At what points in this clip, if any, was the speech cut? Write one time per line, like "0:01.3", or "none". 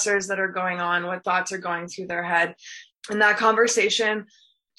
0:02.9